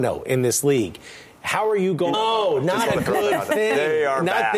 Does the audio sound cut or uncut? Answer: cut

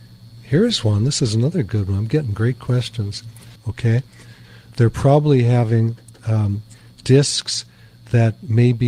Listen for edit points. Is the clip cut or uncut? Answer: cut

